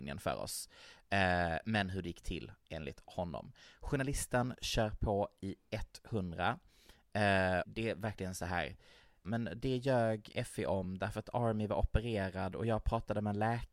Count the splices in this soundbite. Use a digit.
2